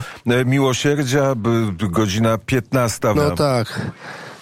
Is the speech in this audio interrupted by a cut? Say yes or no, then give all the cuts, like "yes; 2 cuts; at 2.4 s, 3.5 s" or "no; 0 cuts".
yes; 1 cut; at 3.2 s